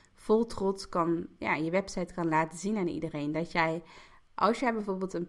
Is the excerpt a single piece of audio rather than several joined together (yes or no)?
yes